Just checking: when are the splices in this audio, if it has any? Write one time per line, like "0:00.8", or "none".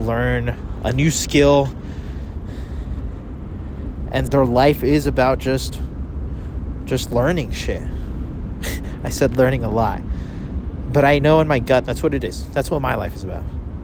0:04.3
0:11.8